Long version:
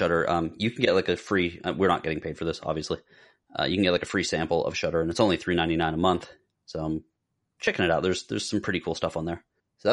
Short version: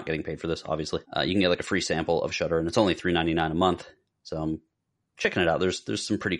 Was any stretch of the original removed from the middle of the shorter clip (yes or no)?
yes